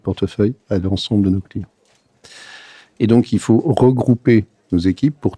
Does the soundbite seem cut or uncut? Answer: uncut